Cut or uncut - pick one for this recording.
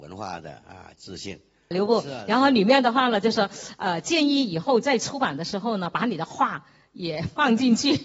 cut